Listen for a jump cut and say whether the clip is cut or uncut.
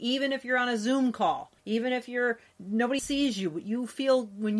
cut